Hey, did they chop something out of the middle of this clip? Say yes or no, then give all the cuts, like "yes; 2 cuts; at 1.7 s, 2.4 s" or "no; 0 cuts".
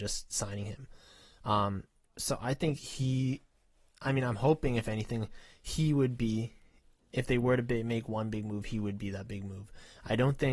no; 0 cuts